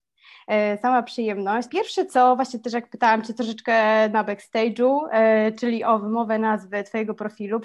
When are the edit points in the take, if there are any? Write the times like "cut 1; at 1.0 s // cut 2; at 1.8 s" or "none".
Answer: cut 1; at 1.7 s